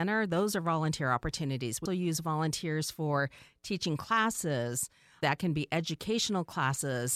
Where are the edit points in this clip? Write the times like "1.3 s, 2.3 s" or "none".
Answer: 1.9 s